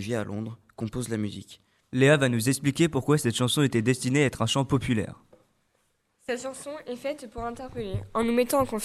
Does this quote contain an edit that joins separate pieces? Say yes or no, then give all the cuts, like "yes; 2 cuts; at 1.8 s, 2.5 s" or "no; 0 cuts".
yes; 1 cut; at 1.8 s